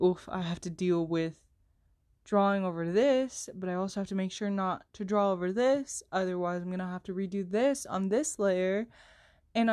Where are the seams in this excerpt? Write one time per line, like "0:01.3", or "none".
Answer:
none